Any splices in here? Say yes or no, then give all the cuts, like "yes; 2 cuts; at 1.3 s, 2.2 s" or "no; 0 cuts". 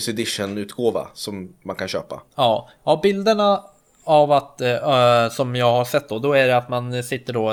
no; 0 cuts